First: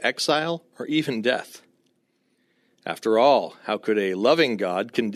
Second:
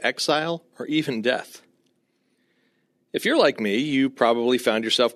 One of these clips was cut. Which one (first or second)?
first